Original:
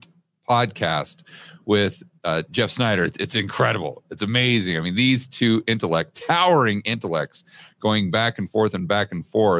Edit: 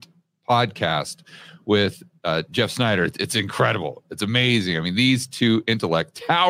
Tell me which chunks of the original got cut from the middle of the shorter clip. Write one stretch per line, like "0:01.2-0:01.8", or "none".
none